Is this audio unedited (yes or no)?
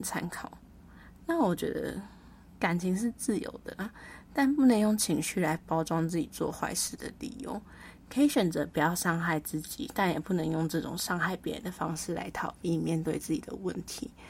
yes